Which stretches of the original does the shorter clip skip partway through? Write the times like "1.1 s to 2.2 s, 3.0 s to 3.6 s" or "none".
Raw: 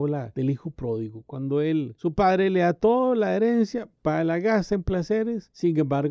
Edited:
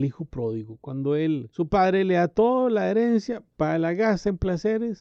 none